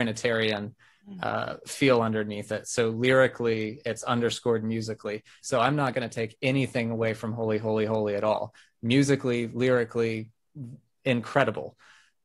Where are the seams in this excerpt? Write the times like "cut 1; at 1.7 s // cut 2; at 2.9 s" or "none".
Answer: cut 1; at 5.4 s